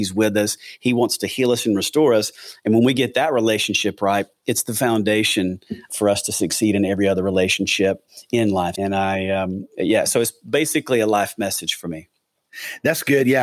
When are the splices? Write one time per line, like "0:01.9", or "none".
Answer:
0:05.9
0:08.7

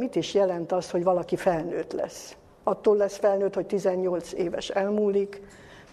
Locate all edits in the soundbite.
none

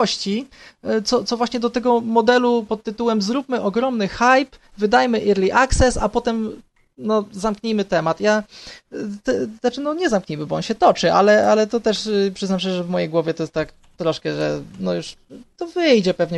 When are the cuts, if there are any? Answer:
none

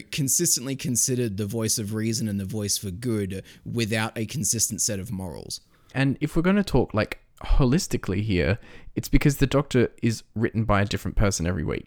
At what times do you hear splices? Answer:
0:05.9

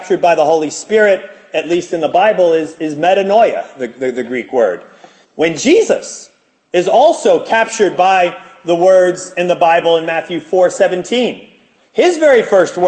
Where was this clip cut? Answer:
0:05.2

